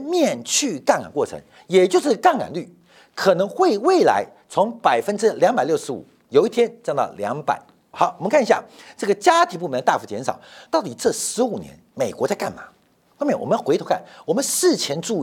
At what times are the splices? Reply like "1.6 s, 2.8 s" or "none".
7.9 s, 10.7 s